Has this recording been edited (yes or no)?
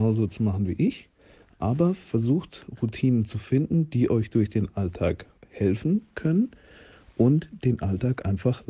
no